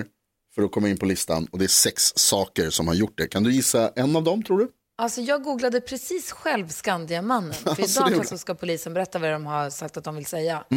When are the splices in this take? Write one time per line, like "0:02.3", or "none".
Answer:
0:08.2